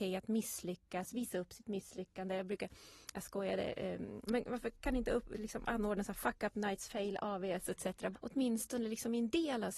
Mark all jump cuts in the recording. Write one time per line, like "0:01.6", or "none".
0:04.3
0:08.1